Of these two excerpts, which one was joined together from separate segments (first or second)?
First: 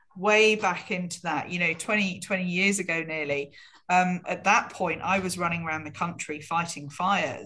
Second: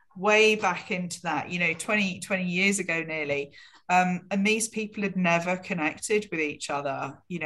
first